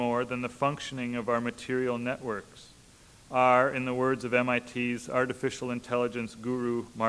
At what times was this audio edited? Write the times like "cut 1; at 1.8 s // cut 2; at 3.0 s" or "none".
none